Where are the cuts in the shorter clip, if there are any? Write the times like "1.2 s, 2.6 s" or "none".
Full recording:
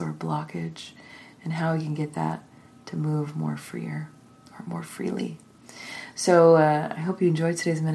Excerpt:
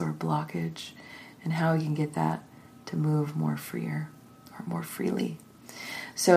none